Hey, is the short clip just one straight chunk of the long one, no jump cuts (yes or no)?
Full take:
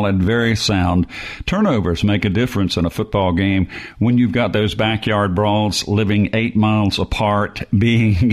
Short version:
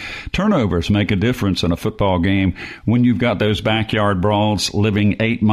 yes